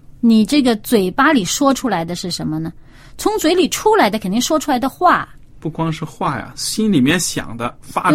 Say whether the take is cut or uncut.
uncut